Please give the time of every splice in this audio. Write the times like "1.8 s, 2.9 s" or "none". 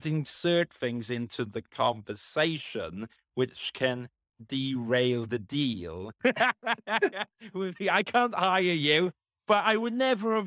6.2 s